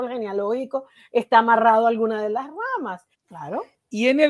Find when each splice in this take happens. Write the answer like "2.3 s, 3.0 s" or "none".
3.1 s